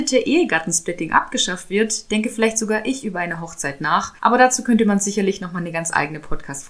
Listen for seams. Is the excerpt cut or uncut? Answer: cut